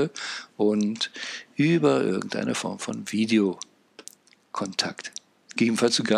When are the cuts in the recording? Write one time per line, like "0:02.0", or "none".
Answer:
none